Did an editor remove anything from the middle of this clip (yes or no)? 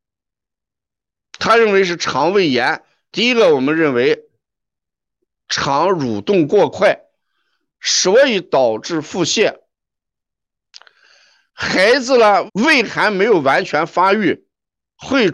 yes